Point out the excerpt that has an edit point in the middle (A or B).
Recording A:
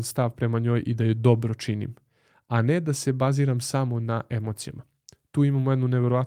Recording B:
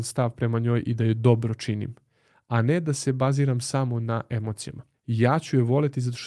B